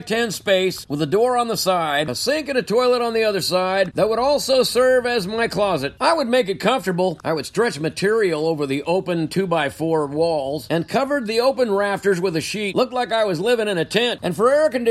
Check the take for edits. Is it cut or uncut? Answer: uncut